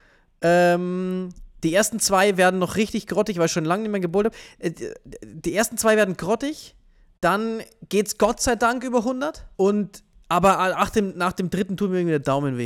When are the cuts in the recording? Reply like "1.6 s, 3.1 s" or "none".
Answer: 9.5 s